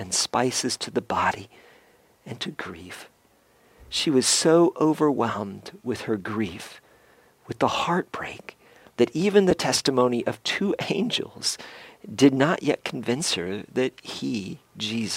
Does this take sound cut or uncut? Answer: uncut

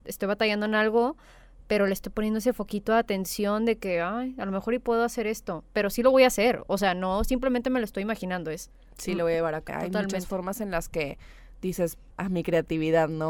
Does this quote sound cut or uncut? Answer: cut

